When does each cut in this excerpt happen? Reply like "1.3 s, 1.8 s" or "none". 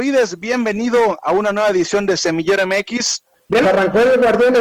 3.6 s